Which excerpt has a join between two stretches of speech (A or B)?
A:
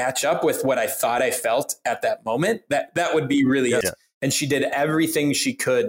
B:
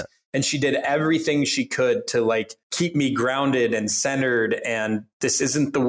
A